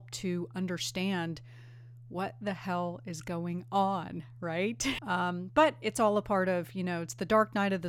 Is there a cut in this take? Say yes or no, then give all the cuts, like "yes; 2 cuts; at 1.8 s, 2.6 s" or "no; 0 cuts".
yes; 1 cut; at 5.0 s